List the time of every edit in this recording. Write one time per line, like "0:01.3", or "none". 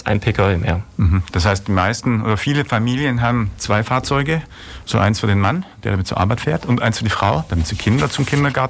none